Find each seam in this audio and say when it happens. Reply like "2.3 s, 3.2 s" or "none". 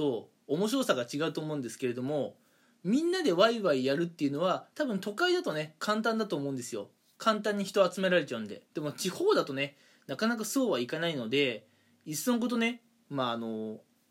8.7 s